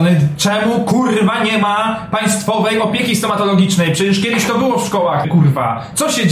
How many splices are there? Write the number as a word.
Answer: one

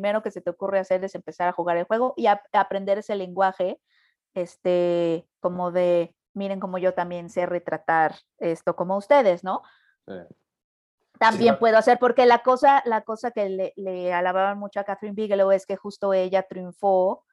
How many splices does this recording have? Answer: zero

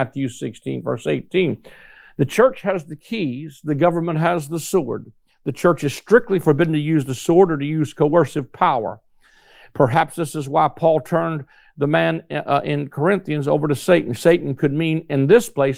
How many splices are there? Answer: zero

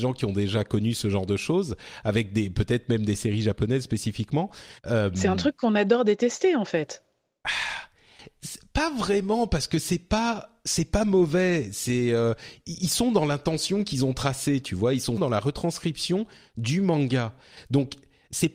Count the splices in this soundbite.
two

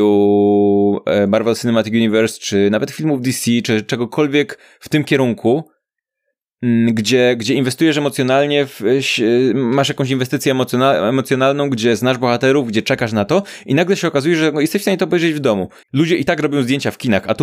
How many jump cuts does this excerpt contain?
one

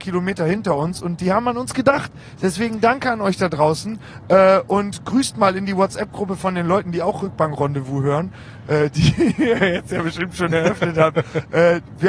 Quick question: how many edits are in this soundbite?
zero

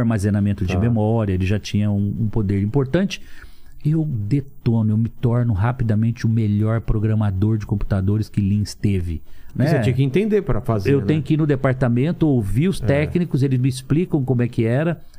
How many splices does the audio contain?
one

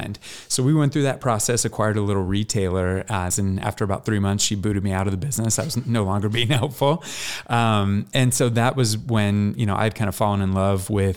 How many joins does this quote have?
one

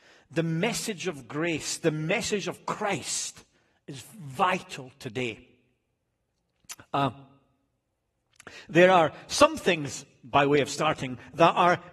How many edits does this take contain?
zero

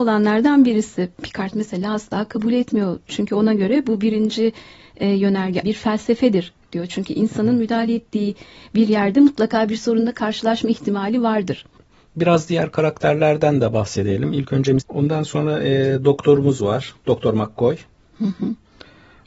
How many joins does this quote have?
two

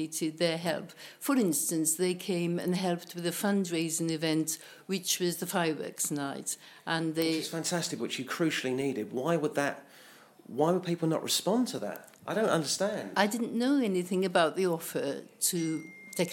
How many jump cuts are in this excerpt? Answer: one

